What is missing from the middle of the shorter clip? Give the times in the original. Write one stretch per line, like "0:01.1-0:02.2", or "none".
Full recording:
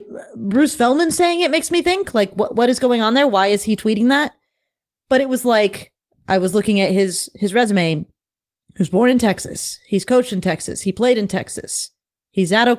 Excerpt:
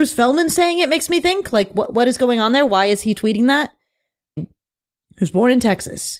0:05.0-0:08.0